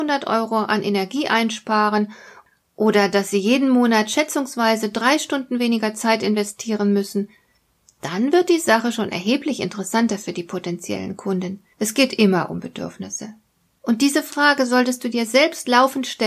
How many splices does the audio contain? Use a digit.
2